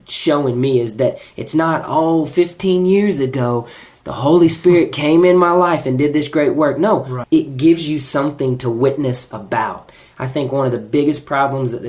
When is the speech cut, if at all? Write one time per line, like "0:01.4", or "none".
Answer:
0:07.2
0:10.1